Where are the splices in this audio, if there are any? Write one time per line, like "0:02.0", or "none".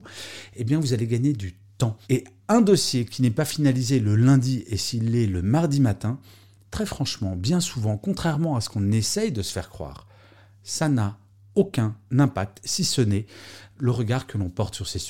0:02.0